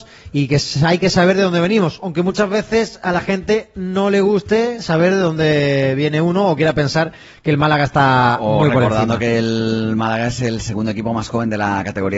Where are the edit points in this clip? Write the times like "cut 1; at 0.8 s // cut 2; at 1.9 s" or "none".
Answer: none